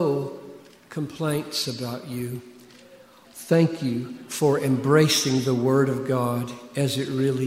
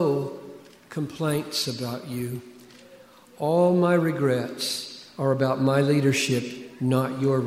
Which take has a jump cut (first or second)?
first